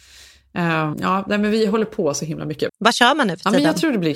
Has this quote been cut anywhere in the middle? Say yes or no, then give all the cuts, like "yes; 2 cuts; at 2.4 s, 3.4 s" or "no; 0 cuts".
yes; 2 cuts; at 0.9 s, 2.7 s